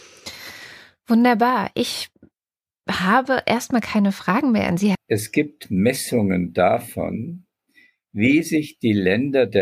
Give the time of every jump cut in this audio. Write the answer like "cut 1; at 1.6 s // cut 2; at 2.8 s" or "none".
cut 1; at 4.9 s